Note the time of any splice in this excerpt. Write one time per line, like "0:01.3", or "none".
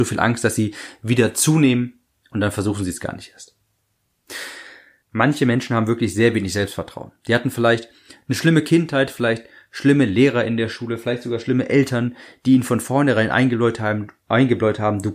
0:05.0